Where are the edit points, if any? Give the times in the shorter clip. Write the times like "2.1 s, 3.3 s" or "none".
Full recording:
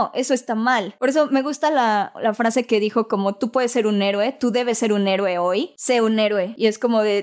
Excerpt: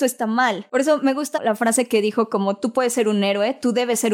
1.3 s